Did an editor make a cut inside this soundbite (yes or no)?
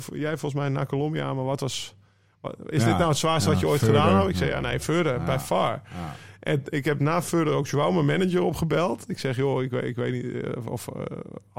no